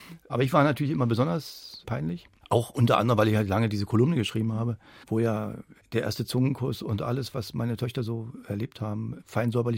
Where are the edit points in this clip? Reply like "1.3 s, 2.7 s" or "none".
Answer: none